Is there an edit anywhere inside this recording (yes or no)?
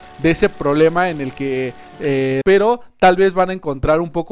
yes